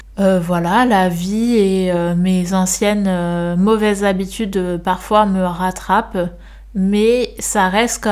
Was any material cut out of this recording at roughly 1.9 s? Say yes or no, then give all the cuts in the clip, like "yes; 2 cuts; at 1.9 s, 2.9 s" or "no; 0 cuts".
no; 0 cuts